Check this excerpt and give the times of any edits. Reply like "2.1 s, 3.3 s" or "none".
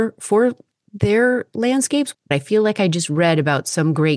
2.1 s

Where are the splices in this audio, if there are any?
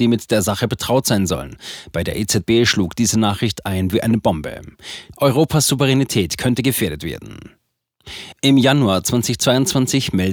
5.1 s

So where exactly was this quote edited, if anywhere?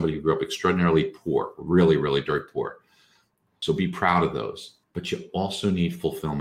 3.5 s, 4.8 s

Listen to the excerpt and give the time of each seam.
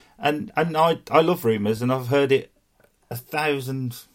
none

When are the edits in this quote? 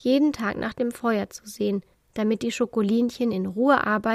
1.9 s

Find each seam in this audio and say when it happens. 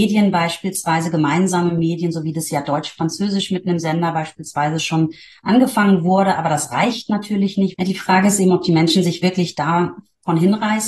7.7 s

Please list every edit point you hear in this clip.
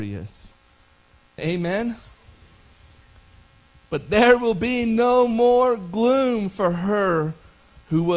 1.4 s, 3.8 s

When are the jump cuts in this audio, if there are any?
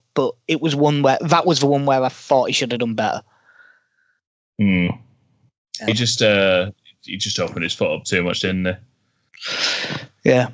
5.9 s

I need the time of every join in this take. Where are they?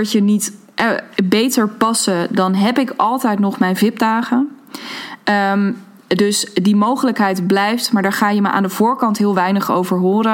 none

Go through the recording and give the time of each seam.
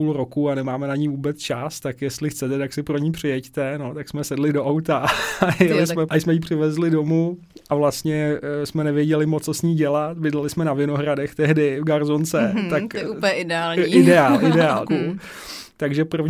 6.1 s, 14.9 s

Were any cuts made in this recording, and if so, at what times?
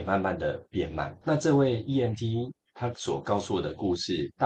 none

